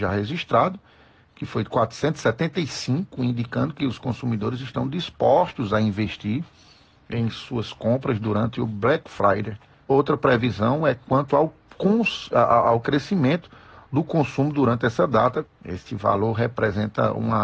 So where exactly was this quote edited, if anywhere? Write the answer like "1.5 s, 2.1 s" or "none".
9.8 s, 15.5 s